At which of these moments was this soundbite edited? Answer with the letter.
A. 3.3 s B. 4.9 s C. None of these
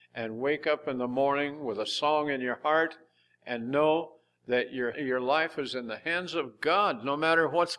B